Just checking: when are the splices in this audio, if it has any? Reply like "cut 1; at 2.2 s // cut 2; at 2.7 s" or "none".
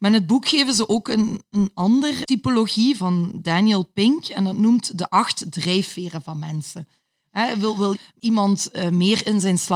cut 1; at 3.0 s // cut 2; at 7.9 s